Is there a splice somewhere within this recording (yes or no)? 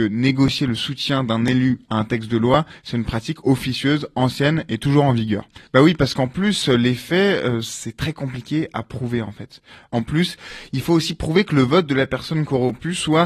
yes